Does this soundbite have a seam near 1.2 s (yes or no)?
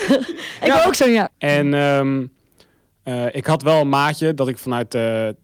yes